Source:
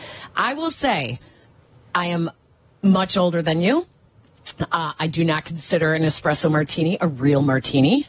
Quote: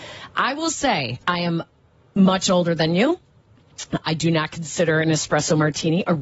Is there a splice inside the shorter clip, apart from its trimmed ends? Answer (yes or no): yes